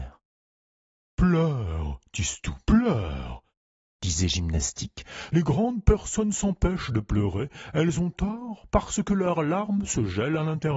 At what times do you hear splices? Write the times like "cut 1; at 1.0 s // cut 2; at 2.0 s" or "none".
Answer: cut 1; at 5.3 s

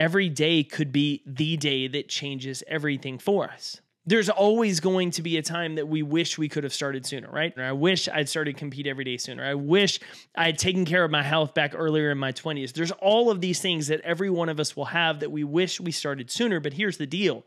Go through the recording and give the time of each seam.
cut 1; at 7.6 s

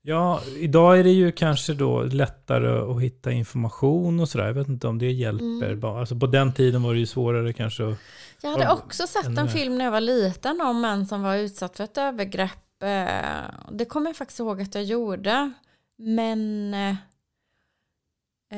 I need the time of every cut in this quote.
none

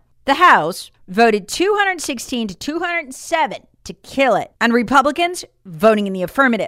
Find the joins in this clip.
cut 1; at 1.0 s // cut 2; at 4.6 s

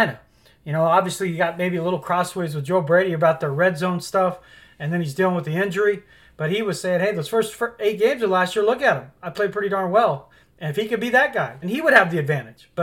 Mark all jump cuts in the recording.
cut 1; at 10.4 s // cut 2; at 11.6 s

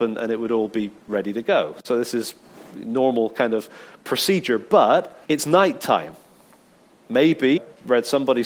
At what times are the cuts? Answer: cut 1; at 5.2 s // cut 2; at 7.6 s

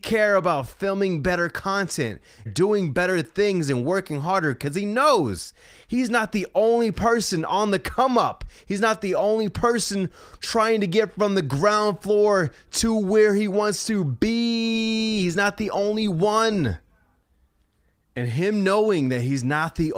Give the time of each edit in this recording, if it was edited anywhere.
cut 1; at 2.5 s

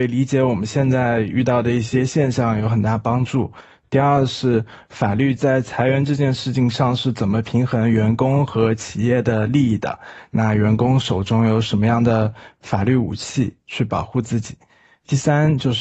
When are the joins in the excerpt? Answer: none

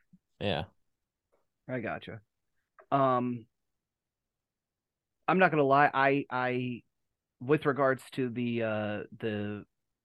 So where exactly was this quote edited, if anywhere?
cut 1; at 2.7 s

